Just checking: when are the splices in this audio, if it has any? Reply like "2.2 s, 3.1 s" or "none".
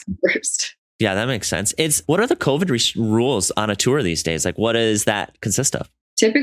2.0 s